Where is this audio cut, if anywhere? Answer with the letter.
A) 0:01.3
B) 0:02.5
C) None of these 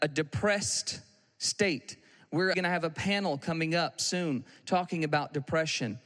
B